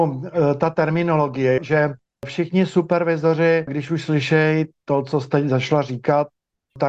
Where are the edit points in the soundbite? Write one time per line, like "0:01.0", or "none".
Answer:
0:01.6
0:03.7